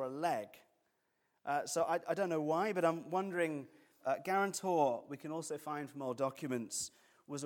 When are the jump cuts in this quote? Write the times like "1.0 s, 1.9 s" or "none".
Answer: 4.0 s